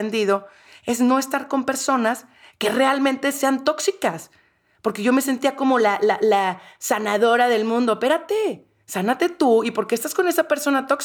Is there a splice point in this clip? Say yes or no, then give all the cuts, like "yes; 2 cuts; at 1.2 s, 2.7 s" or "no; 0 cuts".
no; 0 cuts